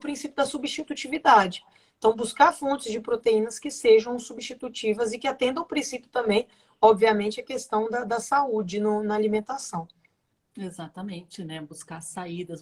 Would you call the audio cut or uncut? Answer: uncut